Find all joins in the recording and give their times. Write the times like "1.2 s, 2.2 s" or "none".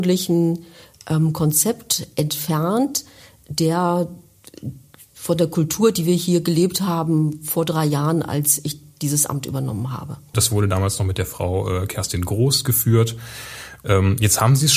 10.3 s, 13.8 s